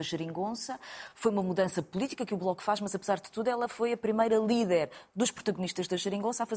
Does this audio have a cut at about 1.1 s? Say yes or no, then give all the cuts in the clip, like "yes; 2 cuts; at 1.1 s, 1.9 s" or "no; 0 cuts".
no; 0 cuts